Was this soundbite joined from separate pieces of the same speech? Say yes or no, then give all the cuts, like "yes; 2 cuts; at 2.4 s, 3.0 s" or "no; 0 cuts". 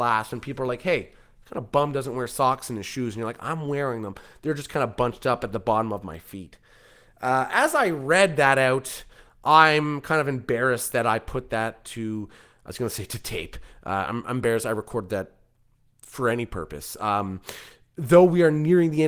no; 0 cuts